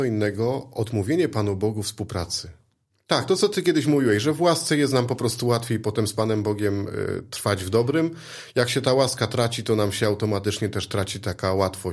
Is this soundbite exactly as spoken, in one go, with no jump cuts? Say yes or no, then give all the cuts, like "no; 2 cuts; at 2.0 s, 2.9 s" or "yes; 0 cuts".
no; 1 cut; at 2.9 s